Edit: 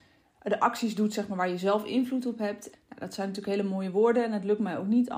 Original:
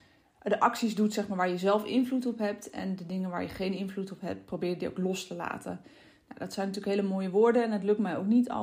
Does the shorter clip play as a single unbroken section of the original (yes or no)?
no